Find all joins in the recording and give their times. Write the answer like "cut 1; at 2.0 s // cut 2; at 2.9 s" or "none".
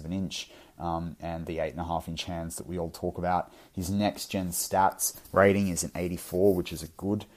none